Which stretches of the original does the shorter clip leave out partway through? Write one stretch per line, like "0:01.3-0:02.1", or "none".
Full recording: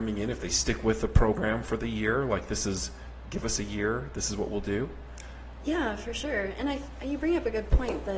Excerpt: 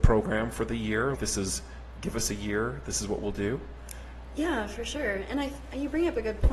0:02.3-0:02.4